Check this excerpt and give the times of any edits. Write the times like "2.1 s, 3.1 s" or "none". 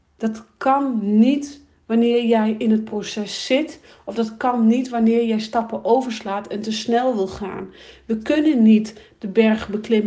none